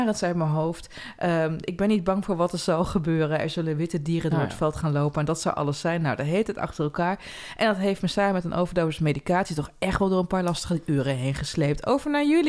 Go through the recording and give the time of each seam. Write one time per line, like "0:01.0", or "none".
none